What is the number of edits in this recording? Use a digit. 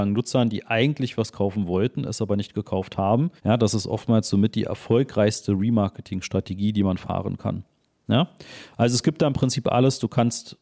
1